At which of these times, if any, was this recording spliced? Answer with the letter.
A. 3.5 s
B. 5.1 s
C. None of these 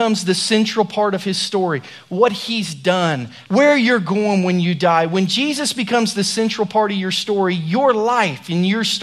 A